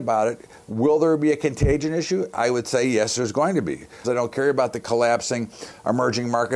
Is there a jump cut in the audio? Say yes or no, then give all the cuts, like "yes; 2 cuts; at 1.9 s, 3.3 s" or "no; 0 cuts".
yes; 1 cut; at 4.0 s